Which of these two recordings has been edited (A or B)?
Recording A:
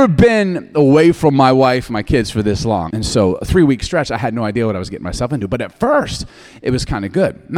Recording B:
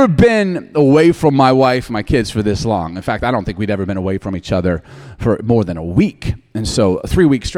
A